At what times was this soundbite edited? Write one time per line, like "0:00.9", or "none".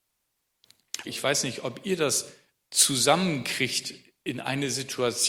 0:01.0

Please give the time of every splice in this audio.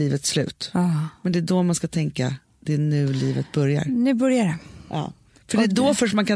none

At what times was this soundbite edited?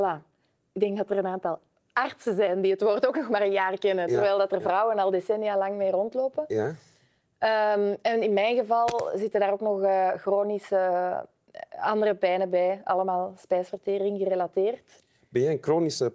none

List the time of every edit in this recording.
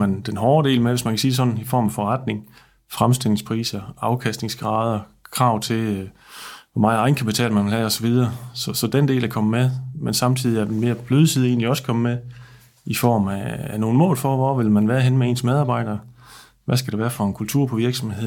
none

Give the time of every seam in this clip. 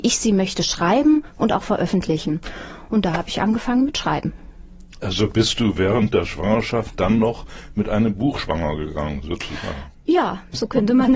none

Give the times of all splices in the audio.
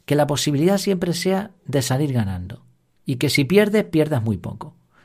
none

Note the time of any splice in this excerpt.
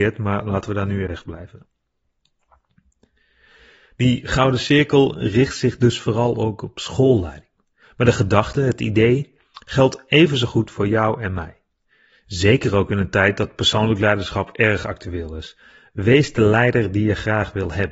0:01.1

